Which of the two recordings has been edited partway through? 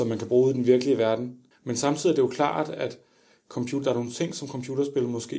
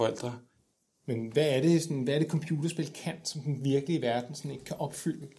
first; 1 cut; at 1.5 s

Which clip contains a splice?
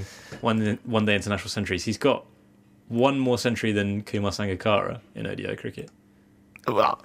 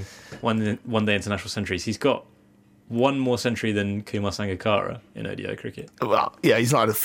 second; 1 cut; at 5.9 s

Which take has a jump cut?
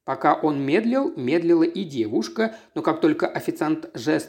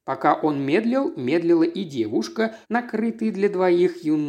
second; 1 cut; at 2.6 s

